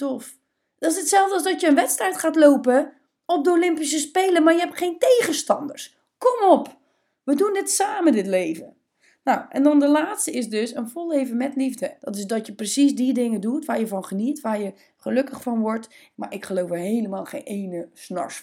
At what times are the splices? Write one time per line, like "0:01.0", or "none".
0:12.0
0:16.1